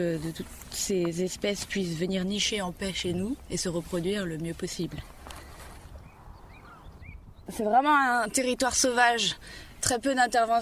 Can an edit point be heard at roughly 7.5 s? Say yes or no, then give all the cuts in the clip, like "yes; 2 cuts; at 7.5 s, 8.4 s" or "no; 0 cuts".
yes; 1 cut; at 7.5 s